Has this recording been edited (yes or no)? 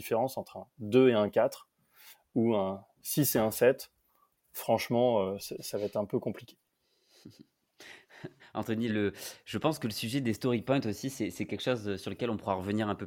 yes